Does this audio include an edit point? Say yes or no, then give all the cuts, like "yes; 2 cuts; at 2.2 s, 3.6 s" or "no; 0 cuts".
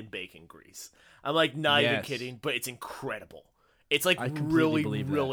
no; 0 cuts